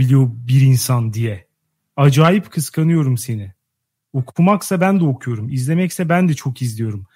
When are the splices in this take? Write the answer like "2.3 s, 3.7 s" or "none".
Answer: none